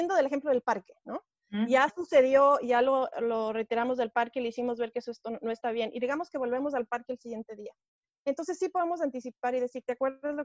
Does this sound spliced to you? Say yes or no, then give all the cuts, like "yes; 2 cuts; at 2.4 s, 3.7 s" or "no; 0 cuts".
no; 0 cuts